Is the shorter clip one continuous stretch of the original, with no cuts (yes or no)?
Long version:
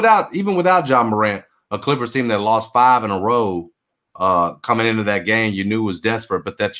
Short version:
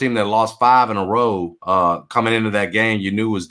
no